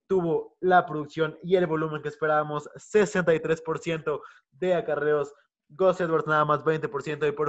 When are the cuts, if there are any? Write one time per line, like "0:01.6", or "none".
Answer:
none